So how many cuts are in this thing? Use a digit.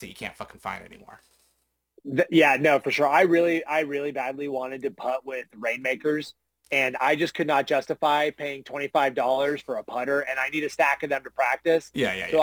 0